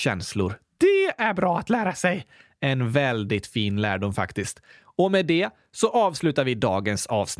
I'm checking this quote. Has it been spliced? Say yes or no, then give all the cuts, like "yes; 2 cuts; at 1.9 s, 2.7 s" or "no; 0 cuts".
no; 0 cuts